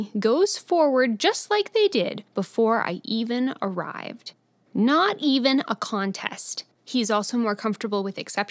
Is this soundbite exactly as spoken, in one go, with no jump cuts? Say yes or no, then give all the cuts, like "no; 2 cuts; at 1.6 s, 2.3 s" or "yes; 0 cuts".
no; 2 cuts; at 4.7 s, 6.7 s